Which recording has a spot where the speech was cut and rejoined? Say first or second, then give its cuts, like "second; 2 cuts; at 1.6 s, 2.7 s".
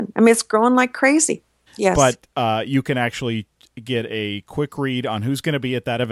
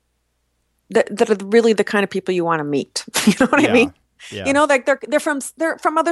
first; 1 cut; at 1.7 s